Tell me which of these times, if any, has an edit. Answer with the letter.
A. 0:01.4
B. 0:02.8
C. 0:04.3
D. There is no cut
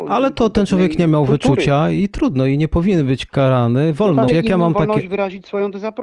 C